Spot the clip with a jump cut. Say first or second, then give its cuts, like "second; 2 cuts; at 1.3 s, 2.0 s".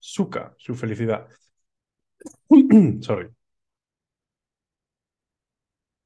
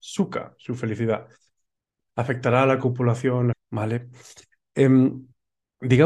second; 2 cuts; at 2.1 s, 3.5 s